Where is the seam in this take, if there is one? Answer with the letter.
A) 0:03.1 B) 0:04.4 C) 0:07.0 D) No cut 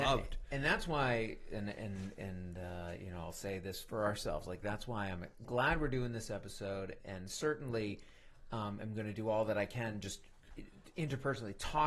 C